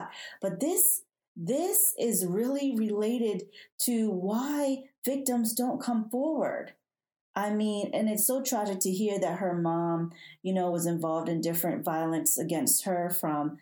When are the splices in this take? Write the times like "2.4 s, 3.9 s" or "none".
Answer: none